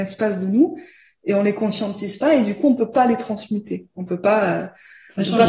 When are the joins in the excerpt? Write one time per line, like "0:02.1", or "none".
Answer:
none